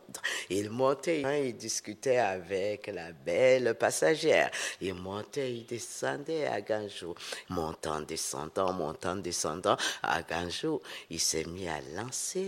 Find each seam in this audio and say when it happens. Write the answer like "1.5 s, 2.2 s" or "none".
1.2 s, 7.5 s

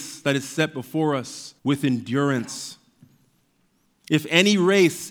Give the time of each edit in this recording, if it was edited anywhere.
1.6 s

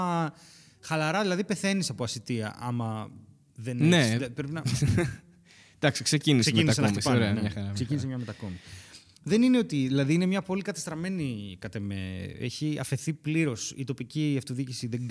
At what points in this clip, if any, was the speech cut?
none

